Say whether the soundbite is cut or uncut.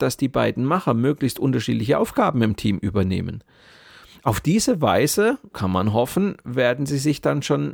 cut